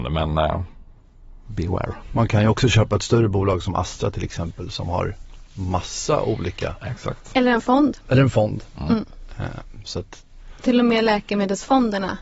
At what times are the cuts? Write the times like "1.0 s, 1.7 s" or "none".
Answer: none